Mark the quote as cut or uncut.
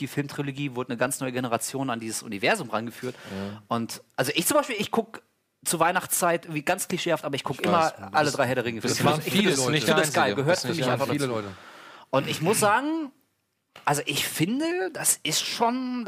uncut